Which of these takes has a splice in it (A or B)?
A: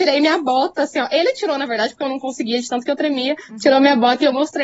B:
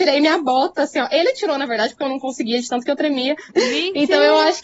B